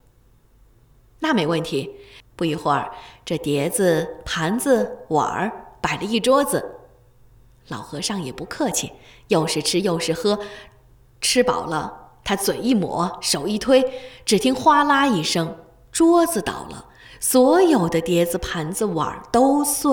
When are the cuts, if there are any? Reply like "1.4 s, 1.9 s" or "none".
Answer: 2.2 s